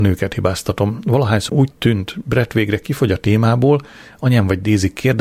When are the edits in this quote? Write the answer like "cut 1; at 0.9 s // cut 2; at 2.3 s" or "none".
cut 1; at 1.5 s